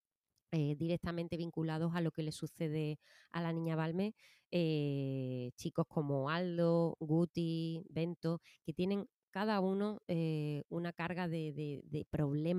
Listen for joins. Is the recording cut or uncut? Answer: uncut